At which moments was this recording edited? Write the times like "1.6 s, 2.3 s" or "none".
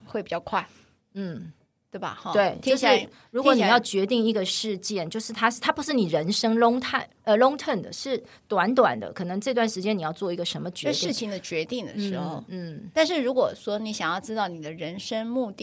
none